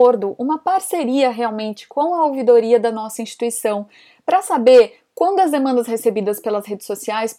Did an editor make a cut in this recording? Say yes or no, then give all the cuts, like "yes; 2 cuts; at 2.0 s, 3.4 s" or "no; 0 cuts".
no; 0 cuts